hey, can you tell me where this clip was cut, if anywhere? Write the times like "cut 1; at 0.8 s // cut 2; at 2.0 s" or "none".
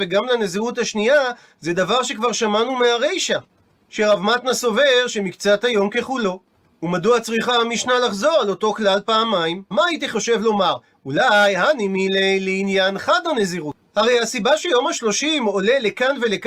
cut 1; at 9.7 s // cut 2; at 13.9 s